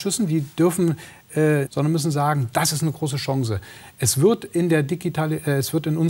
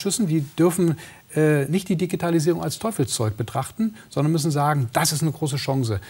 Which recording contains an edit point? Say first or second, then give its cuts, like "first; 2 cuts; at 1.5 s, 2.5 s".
first; 1 cut; at 1.7 s